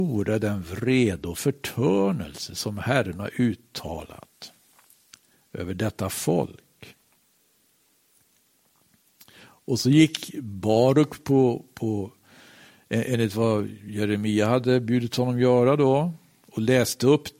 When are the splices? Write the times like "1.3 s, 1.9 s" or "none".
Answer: none

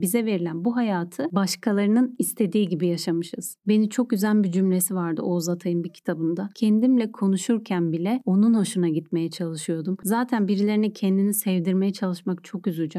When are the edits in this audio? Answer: 10.0 s

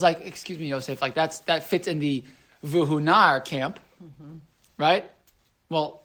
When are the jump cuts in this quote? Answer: none

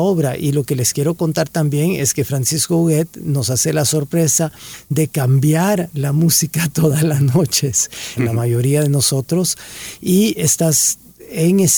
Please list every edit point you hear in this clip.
8.2 s

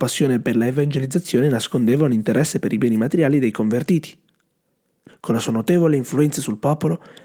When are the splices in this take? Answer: 5.1 s

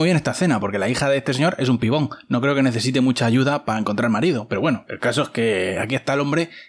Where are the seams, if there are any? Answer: none

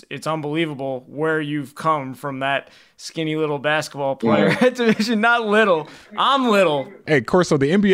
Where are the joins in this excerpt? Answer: none

